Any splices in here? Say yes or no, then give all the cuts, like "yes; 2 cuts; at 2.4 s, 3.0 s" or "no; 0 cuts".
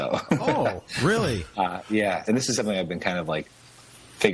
yes; 1 cut; at 2.2 s